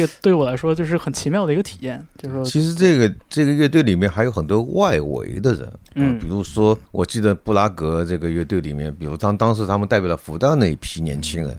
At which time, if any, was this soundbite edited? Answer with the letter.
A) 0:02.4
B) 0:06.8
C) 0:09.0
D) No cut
B